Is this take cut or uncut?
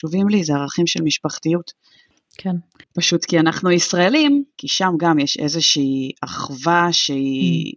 cut